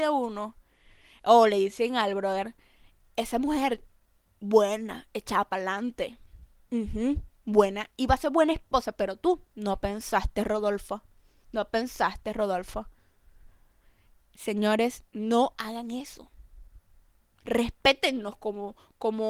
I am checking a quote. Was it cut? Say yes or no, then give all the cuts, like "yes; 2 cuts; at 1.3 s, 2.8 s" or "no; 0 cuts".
no; 0 cuts